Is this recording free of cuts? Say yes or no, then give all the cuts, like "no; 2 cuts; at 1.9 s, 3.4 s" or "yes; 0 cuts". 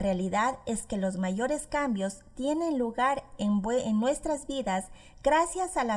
yes; 0 cuts